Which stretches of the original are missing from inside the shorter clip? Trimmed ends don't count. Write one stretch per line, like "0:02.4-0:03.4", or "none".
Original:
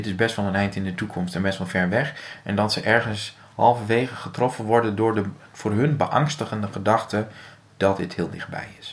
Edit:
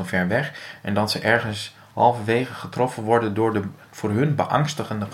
none

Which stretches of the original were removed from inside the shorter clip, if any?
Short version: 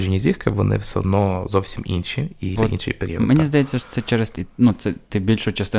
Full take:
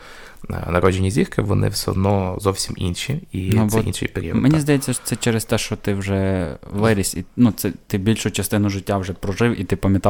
0:03.5-0:03.7
0:05.5-0:07.1

